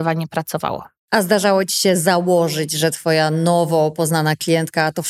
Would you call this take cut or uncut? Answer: uncut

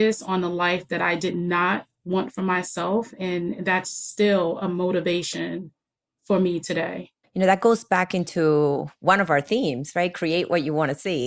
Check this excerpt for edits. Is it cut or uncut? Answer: uncut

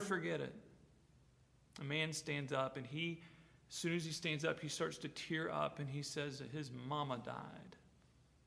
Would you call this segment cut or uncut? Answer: uncut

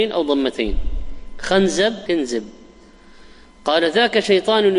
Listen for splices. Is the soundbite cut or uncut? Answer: cut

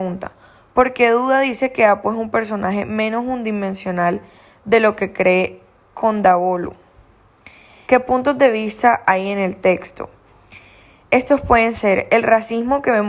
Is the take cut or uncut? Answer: cut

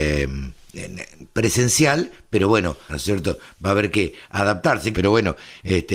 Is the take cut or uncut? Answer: cut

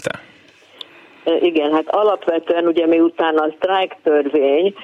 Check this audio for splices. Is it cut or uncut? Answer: uncut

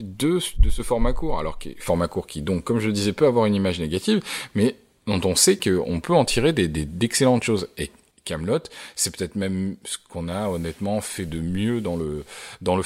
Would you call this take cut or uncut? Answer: uncut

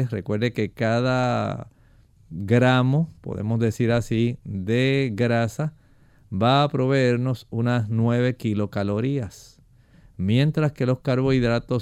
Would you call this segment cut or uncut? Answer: uncut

